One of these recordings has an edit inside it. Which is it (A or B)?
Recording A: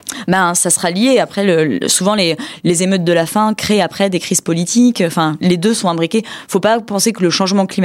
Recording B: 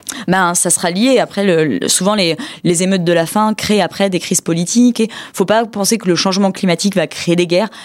B